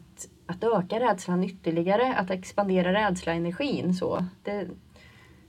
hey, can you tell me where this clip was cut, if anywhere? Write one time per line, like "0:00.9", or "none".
none